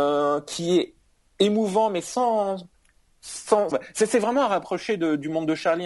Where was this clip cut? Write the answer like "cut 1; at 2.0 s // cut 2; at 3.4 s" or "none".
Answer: cut 1; at 3.7 s